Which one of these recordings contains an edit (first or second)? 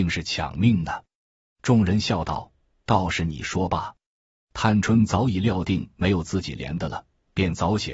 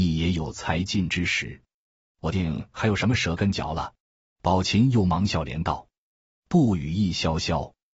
second